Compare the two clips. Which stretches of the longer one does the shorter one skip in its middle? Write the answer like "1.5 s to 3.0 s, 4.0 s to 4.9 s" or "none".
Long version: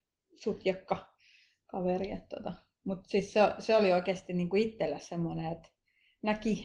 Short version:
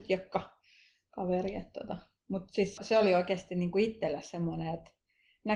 3.3 s to 3.6 s